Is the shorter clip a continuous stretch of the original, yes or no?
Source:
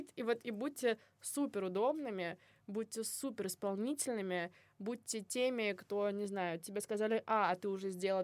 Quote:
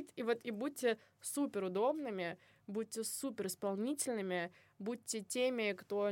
yes